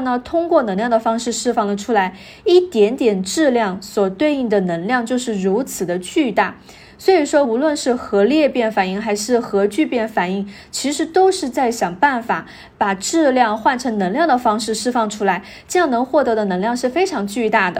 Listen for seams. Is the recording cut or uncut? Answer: uncut